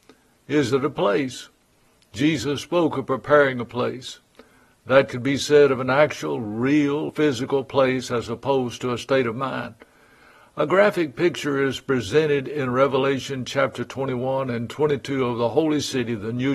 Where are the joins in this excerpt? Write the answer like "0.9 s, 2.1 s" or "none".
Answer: 7.1 s